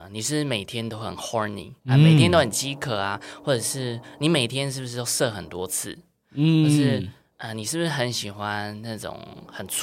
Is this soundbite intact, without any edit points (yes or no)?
no